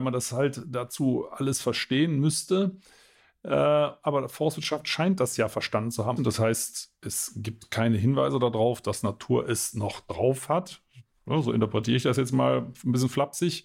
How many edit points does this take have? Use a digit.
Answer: 1